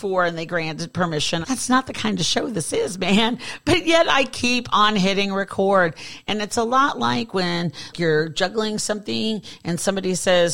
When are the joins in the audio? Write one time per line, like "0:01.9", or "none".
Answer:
0:01.4
0:07.9